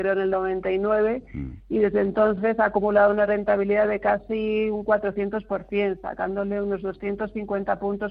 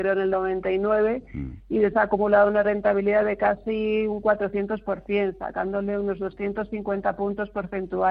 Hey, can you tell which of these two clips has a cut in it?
second; 1 cut; at 1.9 s

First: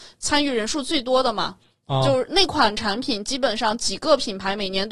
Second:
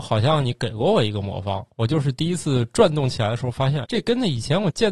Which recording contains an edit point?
second; 2 cuts; at 1.7 s, 3.8 s

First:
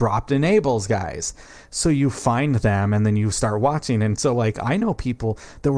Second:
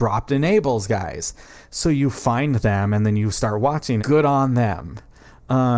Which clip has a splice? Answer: second; 1 cut; at 4.0 s

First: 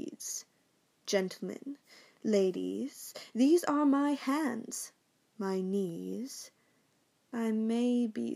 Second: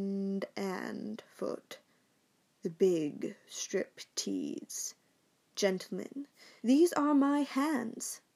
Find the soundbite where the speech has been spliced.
second; 1 cut; at 6.6 s

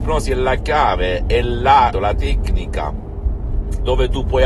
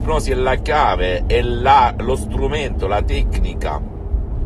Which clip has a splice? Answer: first; 1 cut; at 1.9 s

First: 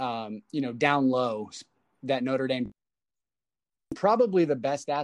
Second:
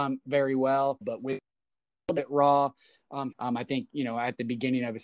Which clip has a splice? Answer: second; 2 cuts; at 1.0 s, 3.3 s

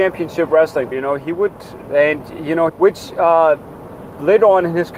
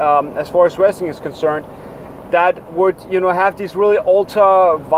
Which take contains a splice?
first; 2 cuts; at 0.9 s, 2.7 s

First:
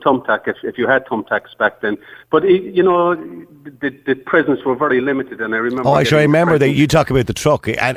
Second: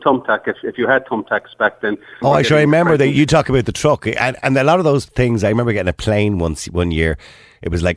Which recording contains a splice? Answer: second; 1 cut; at 2.2 s

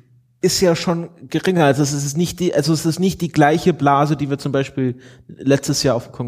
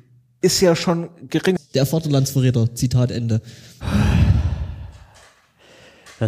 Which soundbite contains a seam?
second; 1 cut; at 1.6 s

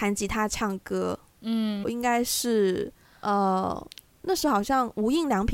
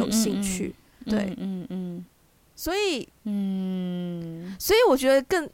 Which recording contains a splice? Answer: first; 1 cut; at 1.8 s

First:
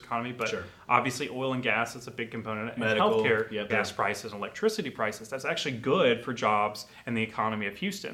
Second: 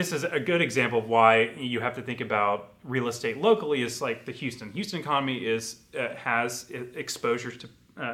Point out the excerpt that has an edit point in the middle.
first; 1 cut; at 3.7 s

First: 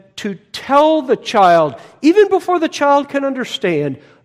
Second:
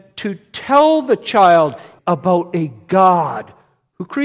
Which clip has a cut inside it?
second; 1 cut; at 2.0 s

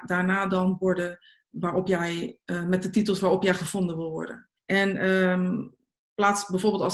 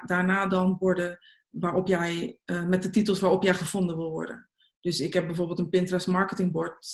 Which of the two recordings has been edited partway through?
first; 1 cut; at 4.6 s

